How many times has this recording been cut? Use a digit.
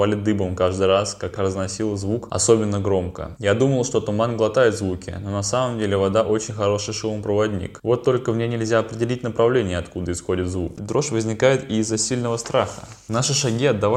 2